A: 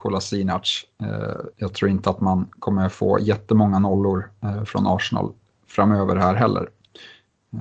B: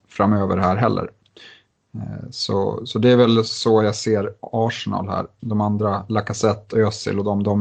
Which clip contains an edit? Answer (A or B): A